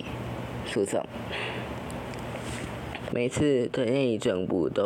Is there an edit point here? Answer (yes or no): yes